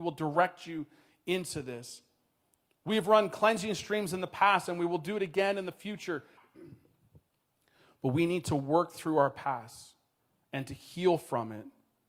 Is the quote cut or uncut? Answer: cut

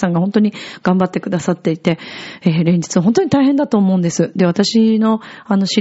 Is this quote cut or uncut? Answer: uncut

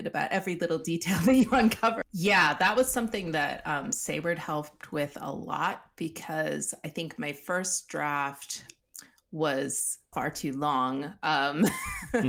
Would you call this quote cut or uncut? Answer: cut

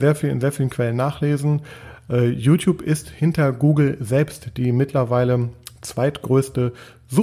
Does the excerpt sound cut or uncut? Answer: uncut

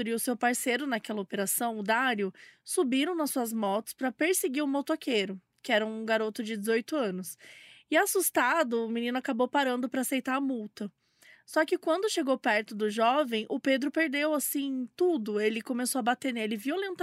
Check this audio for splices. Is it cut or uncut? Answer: uncut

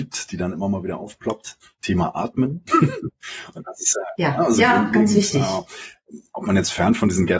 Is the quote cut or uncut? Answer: uncut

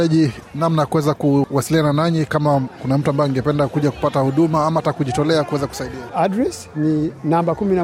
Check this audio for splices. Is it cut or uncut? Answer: cut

